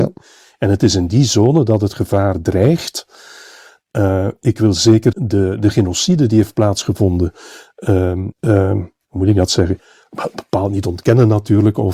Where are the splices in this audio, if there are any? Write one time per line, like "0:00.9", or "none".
0:05.1
0:08.3